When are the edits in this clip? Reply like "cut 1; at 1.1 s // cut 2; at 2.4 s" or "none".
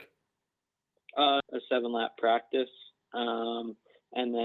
cut 1; at 1.4 s